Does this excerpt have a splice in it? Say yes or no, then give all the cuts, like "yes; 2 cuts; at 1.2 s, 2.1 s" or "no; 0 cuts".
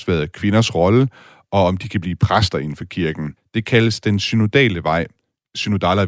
yes; 1 cut; at 3.4 s